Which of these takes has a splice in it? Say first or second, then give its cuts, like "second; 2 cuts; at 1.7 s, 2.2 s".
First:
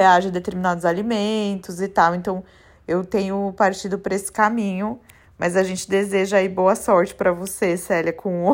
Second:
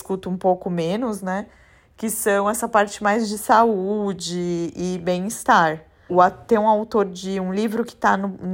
second; 1 cut; at 6.1 s